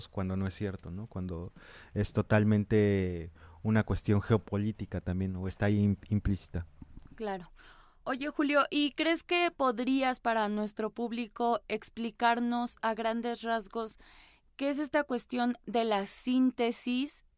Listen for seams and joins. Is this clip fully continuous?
yes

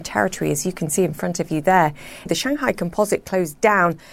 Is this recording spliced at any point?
yes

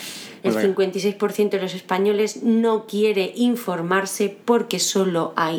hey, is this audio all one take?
yes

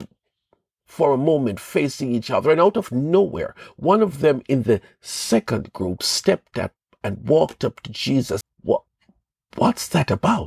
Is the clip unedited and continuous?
no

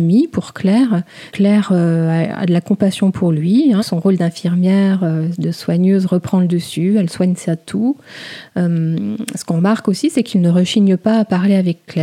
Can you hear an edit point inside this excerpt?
yes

